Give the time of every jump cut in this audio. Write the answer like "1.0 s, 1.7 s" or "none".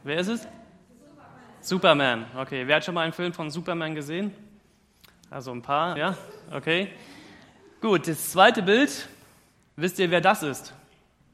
6.0 s